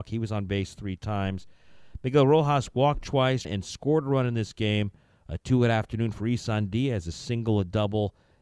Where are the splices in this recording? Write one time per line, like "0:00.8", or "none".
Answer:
0:03.4